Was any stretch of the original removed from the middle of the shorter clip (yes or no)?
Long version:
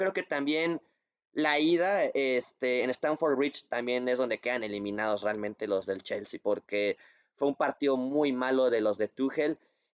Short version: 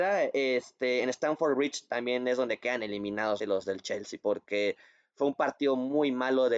yes